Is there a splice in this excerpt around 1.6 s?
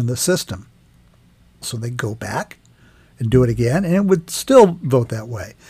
yes; 1 cut; at 1.6 s

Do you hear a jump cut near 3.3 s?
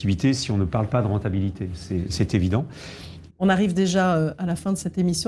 yes; 1 cut; at 3.3 s

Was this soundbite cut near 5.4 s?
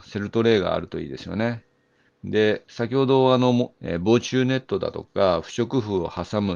no; 2 cuts; at 2.1 s, 3.7 s

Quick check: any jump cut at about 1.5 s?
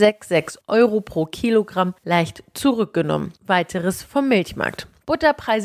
no; 1 cut; at 3.4 s

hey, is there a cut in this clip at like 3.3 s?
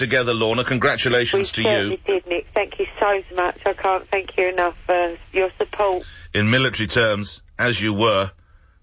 yes; 1 cut; at 3.3 s

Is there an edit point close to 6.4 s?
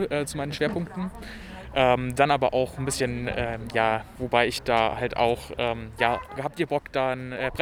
yes; 2 cuts; at 4.2 s, 6.4 s

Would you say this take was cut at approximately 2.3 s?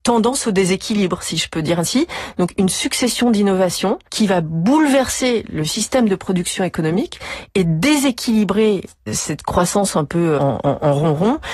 no; 3 cuts; at 4.1 s, 9.1 s, 10.4 s

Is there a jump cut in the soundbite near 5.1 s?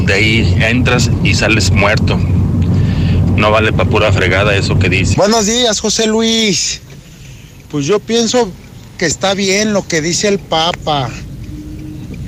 yes; 1 cut; at 5.1 s

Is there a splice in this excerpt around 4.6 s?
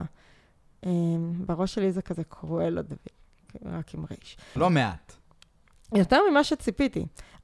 yes; 1 cut; at 4.6 s

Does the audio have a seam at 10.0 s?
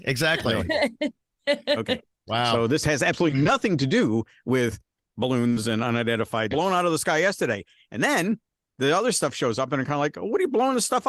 no; 1 cut; at 6.5 s

